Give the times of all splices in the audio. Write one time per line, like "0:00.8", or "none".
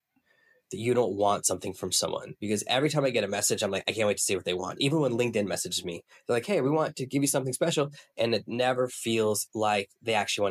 0:08.1
0:09.5